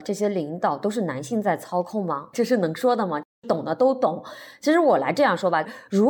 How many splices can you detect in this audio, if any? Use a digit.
0